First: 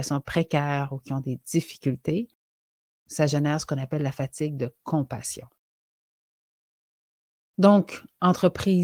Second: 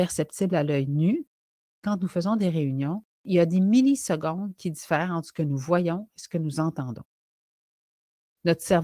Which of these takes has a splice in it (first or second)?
second